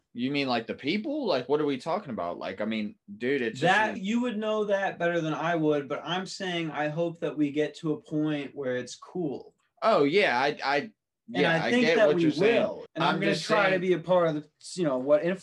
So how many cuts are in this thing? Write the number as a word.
two